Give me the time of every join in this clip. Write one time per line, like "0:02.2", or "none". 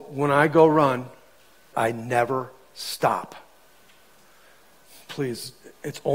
0:01.7